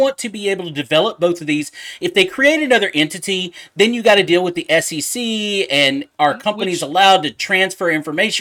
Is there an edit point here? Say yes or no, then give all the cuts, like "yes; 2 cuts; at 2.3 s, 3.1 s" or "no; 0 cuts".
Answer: no; 0 cuts